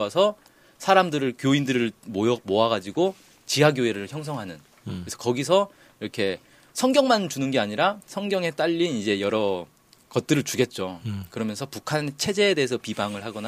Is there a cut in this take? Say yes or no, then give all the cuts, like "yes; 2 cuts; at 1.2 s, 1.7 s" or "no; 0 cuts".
no; 0 cuts